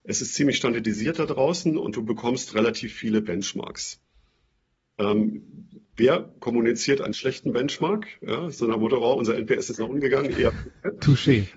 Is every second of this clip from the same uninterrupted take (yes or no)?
yes